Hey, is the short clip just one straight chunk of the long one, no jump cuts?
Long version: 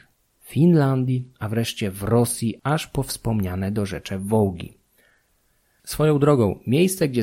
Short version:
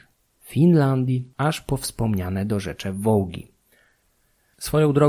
no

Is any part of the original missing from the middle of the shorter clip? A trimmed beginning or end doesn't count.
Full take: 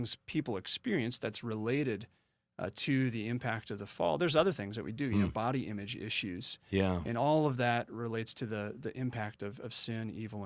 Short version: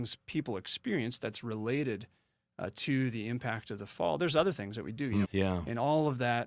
yes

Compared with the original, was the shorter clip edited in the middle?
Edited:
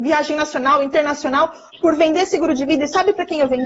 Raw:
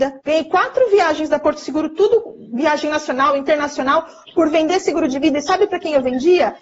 no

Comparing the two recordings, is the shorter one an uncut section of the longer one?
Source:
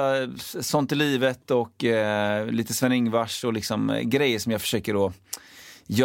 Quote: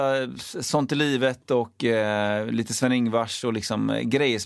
yes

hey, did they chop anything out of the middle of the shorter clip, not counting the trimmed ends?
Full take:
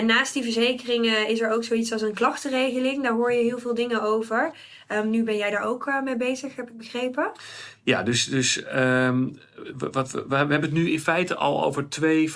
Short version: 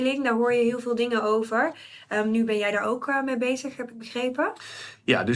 no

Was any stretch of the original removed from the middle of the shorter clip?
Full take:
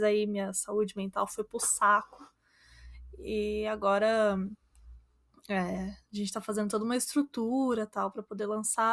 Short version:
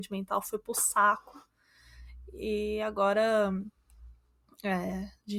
no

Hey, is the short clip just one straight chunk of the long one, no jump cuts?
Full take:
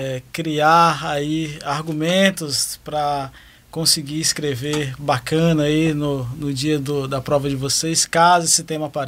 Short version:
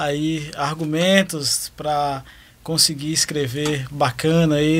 yes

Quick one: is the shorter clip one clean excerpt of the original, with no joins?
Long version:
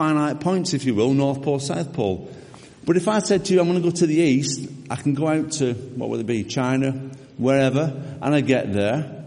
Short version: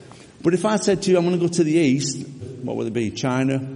no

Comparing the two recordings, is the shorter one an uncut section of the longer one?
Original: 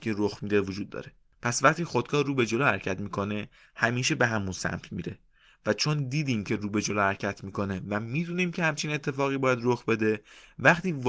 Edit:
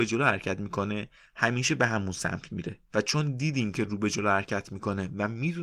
no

